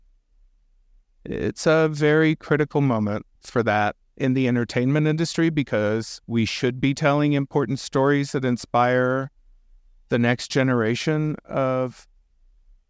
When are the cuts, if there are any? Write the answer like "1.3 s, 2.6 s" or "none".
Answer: 3.4 s, 6.2 s